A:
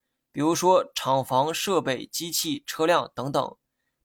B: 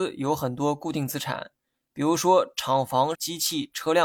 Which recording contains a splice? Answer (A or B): B